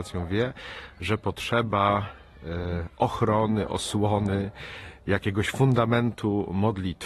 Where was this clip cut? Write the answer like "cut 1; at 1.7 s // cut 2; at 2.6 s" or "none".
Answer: none

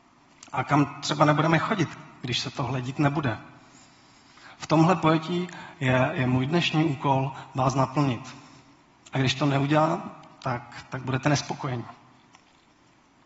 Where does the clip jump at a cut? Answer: none

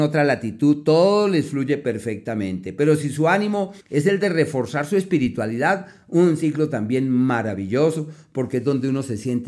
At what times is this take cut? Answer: cut 1; at 3.8 s

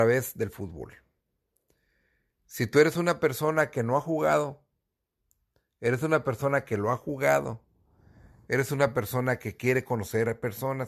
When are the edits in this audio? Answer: none

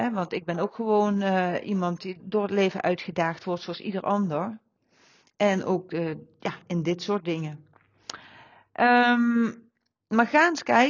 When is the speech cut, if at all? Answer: cut 1; at 2.2 s

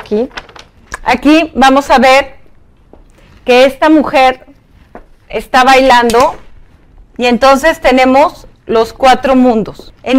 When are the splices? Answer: cut 1; at 8.5 s

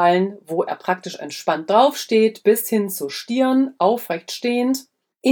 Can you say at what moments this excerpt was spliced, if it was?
none

